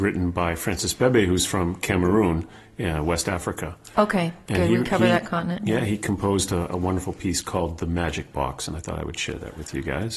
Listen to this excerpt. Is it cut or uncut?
uncut